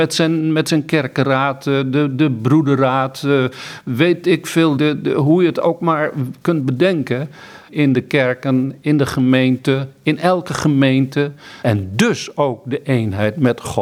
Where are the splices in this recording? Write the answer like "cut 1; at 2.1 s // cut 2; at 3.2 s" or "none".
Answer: cut 1; at 4.8 s // cut 2; at 7.7 s // cut 3; at 11.6 s